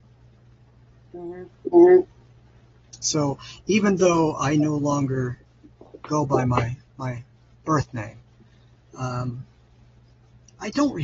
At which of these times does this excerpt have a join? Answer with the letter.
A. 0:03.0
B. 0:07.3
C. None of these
C